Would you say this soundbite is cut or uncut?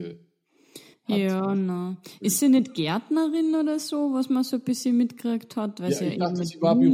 uncut